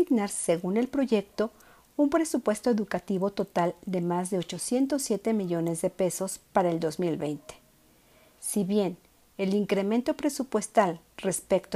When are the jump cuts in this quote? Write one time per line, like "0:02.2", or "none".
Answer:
0:08.4